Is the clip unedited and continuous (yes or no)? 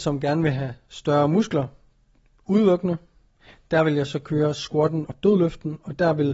no